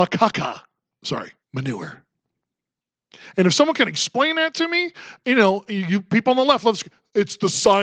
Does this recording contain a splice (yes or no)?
yes